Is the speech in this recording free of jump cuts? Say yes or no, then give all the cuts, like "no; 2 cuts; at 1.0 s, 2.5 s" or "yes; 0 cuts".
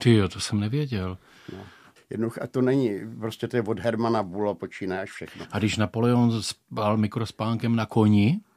no; 1 cut; at 2.0 s